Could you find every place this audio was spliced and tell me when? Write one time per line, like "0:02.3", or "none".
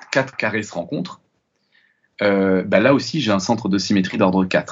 none